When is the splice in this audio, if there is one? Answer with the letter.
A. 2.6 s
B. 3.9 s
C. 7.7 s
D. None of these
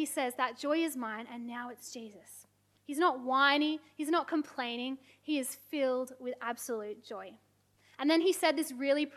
D